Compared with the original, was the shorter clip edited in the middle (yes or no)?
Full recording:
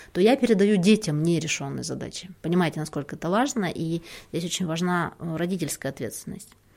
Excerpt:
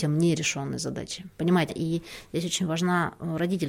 yes